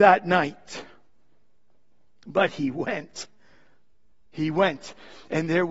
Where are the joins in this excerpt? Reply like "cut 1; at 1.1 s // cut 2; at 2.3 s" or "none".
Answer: none